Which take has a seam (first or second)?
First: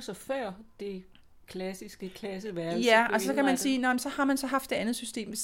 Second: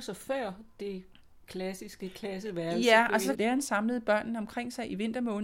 second